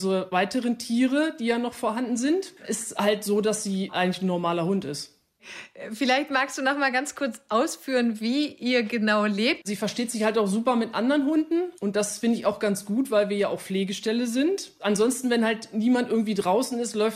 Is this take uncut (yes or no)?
no